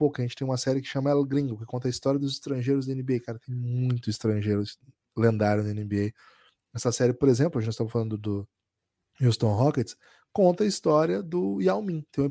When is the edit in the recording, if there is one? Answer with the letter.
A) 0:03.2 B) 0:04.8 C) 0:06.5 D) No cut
D